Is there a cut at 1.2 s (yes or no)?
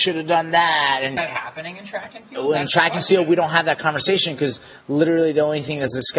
yes